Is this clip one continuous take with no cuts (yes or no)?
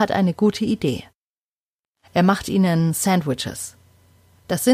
yes